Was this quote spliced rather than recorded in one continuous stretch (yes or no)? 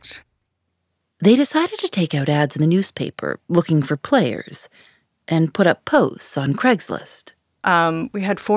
yes